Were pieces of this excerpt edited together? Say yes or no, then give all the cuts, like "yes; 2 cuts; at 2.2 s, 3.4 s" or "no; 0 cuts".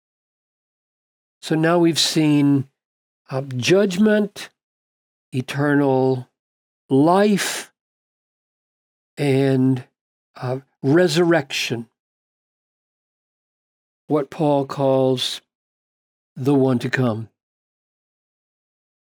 yes; 1 cut; at 13.9 s